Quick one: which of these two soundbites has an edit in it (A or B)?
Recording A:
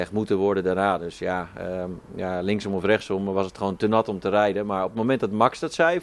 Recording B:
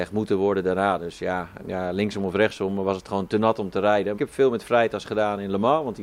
B